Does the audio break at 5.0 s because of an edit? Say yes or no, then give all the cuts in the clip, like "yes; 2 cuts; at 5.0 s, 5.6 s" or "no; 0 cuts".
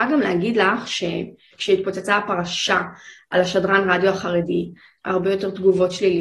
yes; 1 cut; at 5.0 s